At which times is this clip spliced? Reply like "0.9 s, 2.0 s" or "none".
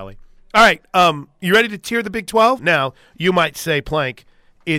2.6 s

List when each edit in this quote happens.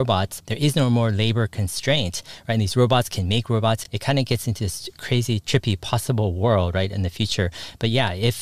none

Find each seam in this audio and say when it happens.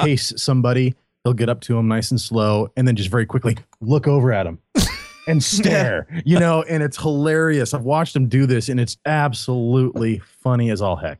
9.0 s

